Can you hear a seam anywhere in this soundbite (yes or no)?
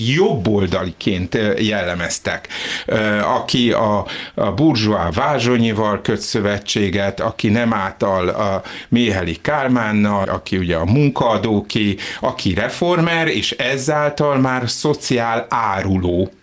yes